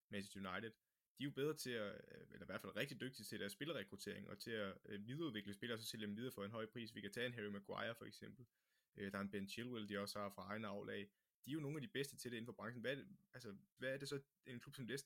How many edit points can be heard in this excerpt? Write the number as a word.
one